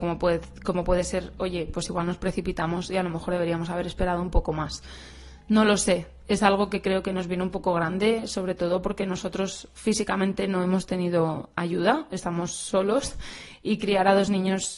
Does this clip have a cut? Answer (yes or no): no